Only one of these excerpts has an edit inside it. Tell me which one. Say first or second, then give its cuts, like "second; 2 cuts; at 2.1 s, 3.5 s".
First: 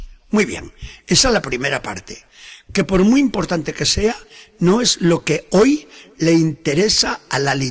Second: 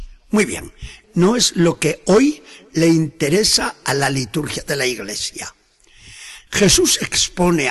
second; 2 cuts; at 1.0 s, 6.5 s